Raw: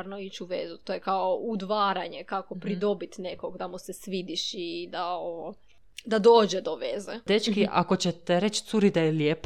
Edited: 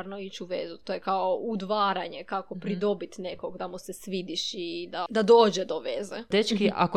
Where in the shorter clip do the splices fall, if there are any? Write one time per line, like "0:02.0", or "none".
0:05.1